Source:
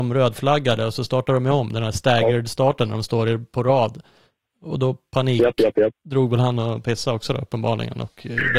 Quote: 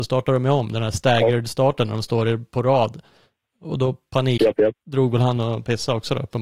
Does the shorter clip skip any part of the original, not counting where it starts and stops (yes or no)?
yes